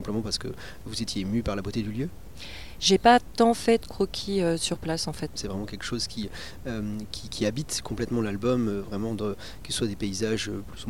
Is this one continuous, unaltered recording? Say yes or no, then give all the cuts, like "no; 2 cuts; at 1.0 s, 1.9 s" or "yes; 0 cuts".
no; 1 cut; at 5.4 s